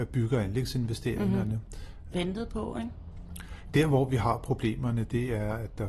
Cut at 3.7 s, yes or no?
yes